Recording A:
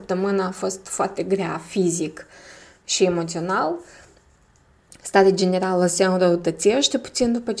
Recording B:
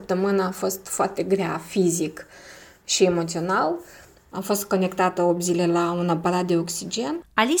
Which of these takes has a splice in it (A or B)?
B